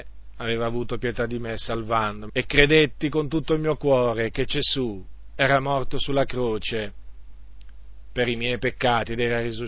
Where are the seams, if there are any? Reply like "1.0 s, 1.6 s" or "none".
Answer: 2.3 s